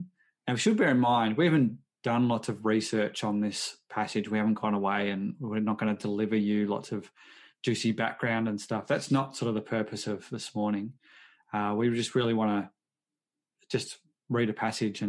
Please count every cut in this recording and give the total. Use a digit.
0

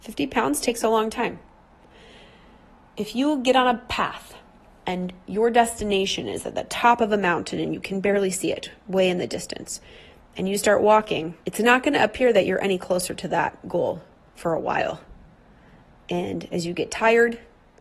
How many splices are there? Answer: 1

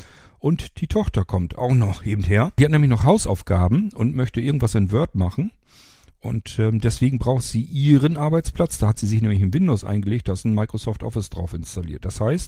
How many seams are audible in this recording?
0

